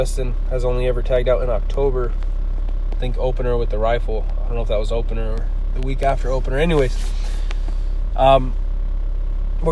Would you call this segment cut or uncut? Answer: uncut